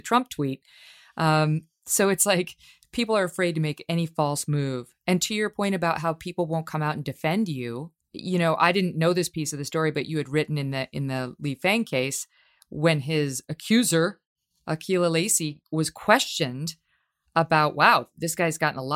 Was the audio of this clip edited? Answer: no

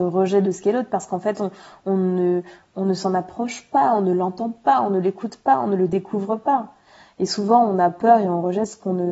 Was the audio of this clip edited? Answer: no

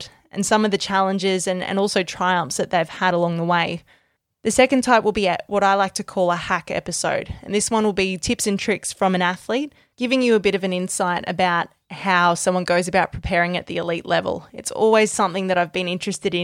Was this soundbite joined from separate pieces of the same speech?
no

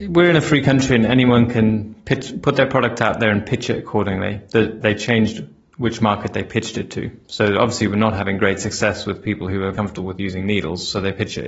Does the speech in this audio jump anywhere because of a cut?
yes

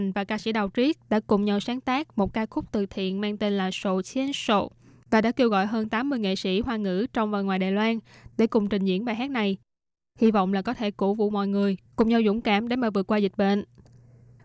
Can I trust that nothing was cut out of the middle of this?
yes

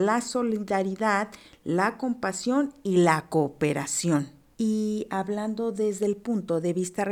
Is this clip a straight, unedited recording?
no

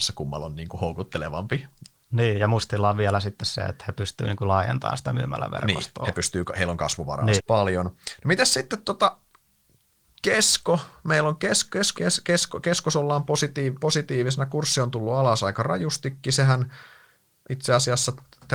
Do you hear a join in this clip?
yes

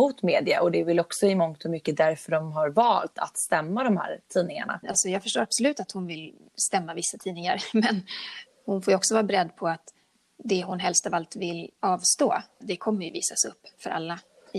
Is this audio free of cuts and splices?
no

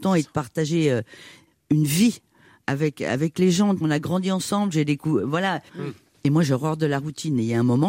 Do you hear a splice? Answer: yes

